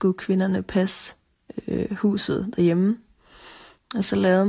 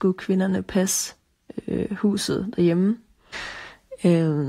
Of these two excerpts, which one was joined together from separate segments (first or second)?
second